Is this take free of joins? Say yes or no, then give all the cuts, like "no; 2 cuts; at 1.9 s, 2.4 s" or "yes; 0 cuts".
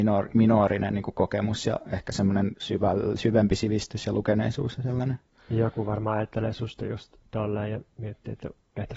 yes; 0 cuts